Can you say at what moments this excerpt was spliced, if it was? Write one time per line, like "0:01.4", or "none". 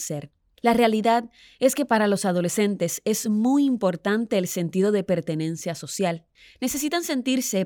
none